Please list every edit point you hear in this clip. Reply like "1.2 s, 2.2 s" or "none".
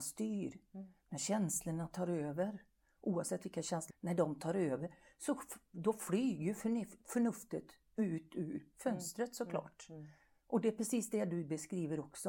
3.9 s